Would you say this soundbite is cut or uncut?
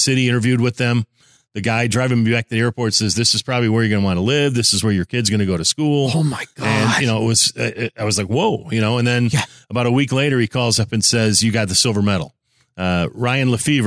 uncut